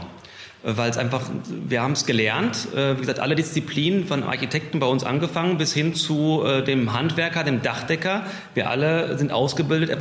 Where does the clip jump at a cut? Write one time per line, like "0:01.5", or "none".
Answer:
none